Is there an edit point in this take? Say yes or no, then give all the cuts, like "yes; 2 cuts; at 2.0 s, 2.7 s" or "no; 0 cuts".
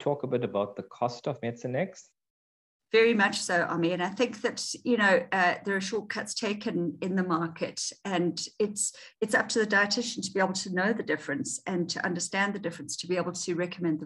yes; 1 cut; at 2.8 s